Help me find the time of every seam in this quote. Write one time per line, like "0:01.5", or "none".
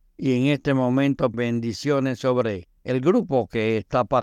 0:01.3
0:02.8

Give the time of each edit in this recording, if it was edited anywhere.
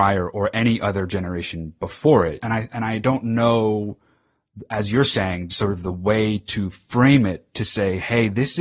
0:02.4
0:05.5

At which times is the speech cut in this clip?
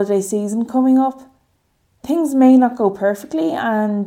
none

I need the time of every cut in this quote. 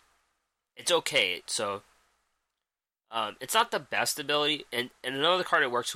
0:01.5

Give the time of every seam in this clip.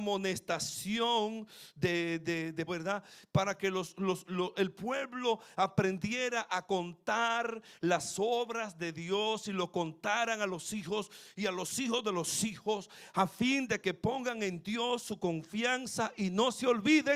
0:02.7

